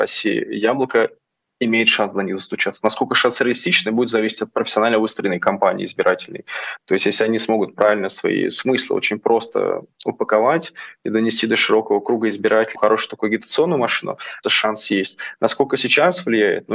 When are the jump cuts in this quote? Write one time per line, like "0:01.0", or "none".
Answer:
0:12.7
0:14.4